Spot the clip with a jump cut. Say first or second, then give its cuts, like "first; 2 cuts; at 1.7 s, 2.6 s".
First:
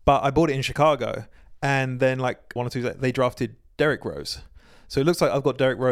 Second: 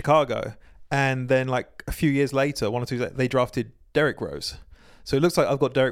first; 1 cut; at 2.6 s